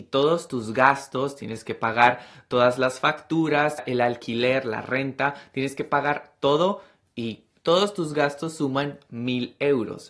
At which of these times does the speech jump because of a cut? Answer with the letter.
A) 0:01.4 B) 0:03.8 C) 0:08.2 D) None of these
B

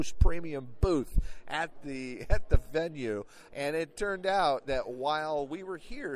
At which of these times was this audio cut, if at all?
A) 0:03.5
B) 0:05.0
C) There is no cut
A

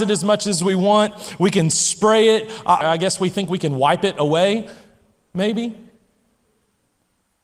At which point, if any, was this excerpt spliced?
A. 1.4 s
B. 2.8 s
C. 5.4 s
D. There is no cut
B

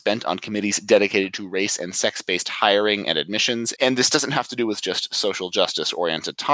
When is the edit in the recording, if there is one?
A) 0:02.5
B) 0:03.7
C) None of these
B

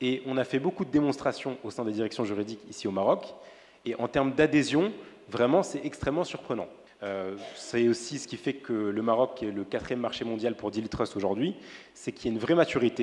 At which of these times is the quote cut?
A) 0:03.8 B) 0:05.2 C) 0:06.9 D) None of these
C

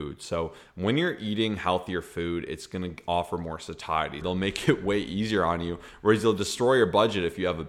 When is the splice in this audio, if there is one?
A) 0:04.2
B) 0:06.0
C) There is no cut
A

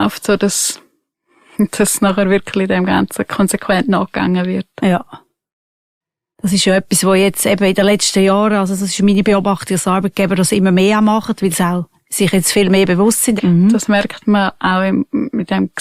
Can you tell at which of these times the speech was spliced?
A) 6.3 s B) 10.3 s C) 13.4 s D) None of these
C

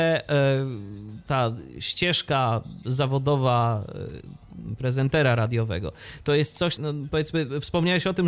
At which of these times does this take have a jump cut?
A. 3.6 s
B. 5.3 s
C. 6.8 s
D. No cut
C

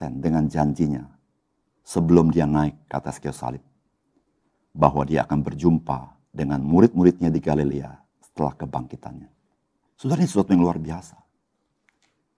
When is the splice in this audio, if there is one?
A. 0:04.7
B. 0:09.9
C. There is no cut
B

